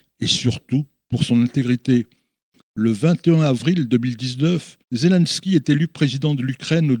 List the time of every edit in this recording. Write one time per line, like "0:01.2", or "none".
0:02.6
0:04.8